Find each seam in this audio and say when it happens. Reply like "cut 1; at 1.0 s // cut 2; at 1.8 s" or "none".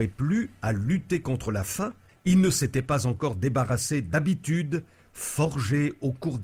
cut 1; at 2.1 s